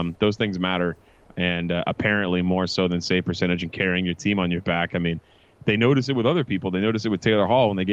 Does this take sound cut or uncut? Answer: uncut